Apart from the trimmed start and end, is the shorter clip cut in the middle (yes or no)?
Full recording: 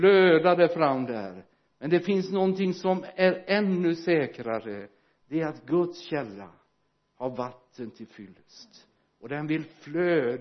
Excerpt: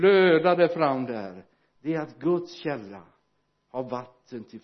yes